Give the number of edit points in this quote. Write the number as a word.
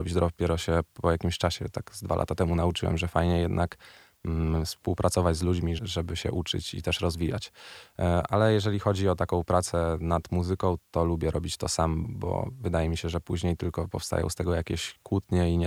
three